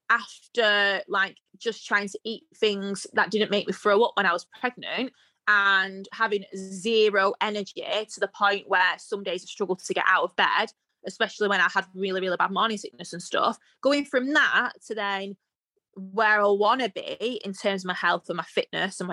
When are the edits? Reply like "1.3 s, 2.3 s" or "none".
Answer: none